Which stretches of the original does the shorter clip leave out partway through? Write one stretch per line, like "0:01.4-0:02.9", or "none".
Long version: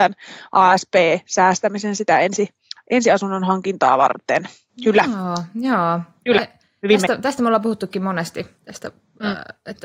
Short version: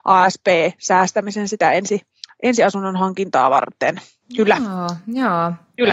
none

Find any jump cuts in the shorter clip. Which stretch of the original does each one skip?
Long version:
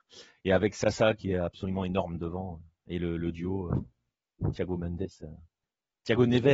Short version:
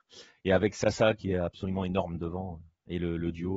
none

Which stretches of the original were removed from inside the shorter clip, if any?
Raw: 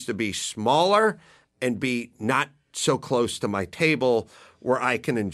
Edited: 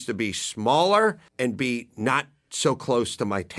0:01.3-0:01.5

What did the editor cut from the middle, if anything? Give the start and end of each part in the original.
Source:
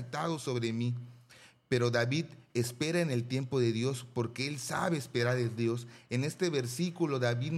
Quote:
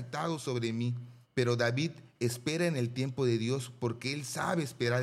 0:01.2-0:01.6

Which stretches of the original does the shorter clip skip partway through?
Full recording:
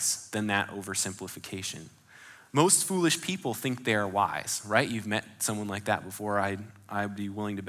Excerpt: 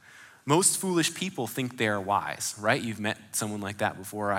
none

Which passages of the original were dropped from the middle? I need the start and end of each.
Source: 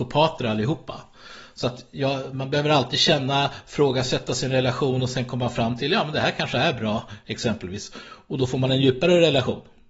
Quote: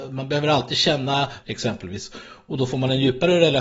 0:03.6-0:07.2

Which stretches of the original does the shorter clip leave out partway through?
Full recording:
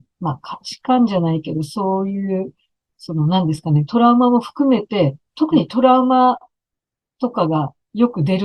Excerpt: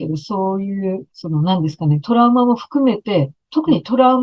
0:02.5-0:02.9

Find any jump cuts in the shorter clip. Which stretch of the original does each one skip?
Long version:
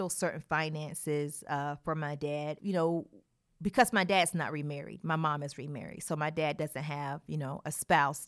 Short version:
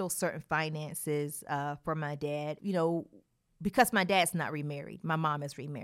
none

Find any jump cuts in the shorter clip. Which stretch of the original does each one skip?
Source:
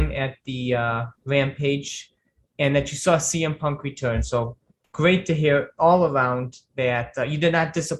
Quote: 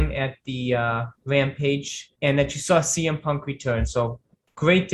0:02.1-0:02.5

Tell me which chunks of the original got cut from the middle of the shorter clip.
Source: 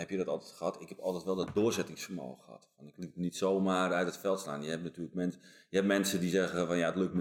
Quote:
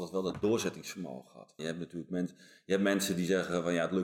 0:02.7-0:04.6

